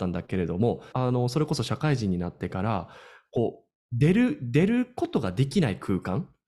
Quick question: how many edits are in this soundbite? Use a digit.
1